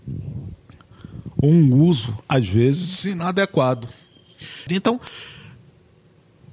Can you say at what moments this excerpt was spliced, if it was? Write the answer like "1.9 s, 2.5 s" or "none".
4.7 s